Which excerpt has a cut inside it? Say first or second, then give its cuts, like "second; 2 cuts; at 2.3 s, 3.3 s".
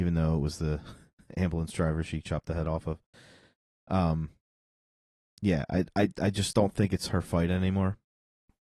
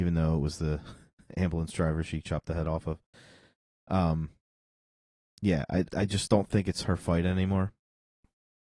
second; 1 cut; at 5.9 s